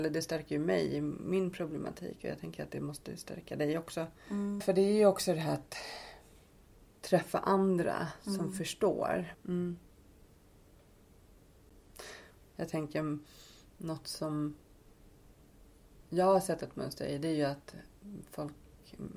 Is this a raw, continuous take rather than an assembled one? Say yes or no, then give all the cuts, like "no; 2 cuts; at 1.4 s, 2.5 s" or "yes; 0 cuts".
no; 3 cuts; at 4.6 s, 9.3 s, 12.5 s